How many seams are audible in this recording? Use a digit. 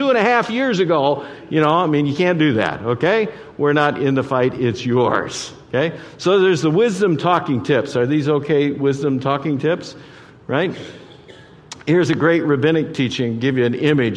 0